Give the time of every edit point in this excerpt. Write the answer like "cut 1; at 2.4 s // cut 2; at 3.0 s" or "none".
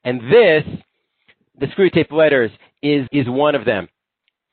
cut 1; at 3.1 s

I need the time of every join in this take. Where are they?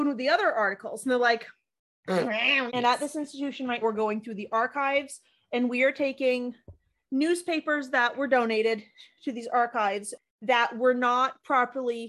cut 1; at 2.7 s // cut 2; at 3.8 s

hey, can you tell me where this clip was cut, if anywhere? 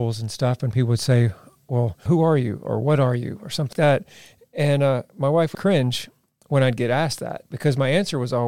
cut 1; at 2.1 s // cut 2; at 3.7 s // cut 3; at 5.5 s

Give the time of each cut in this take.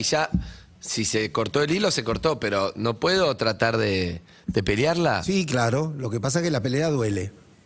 none

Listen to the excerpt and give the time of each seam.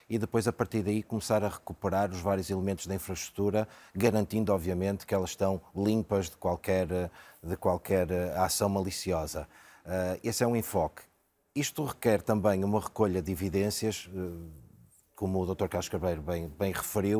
none

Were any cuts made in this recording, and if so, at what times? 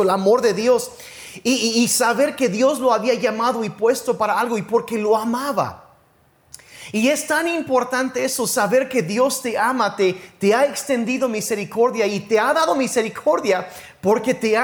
none

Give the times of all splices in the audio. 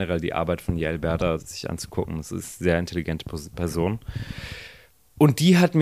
cut 1; at 1.4 s

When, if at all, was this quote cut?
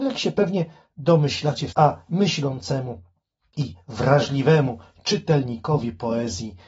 cut 1; at 1.7 s

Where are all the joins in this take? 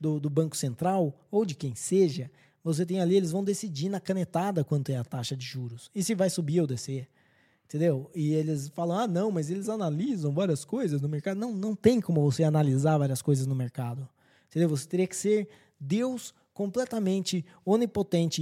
none

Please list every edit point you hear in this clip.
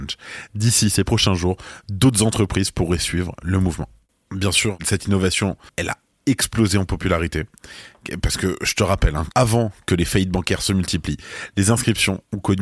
cut 1; at 9.3 s

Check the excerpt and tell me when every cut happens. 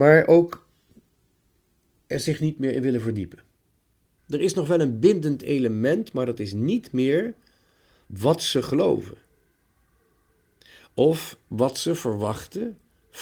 cut 1; at 4.2 s

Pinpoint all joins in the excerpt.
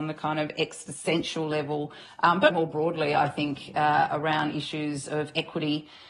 cut 1; at 2.5 s

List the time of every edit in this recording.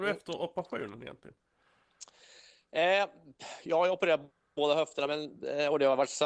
none

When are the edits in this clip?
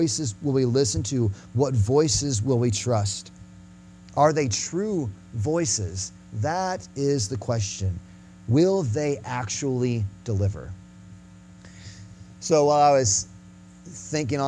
none

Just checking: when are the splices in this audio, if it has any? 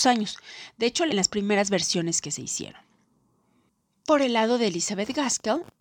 cut 1; at 1.1 s

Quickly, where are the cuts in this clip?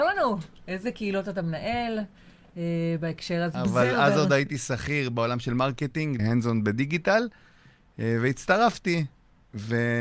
cut 1; at 3.5 s // cut 2; at 6.2 s

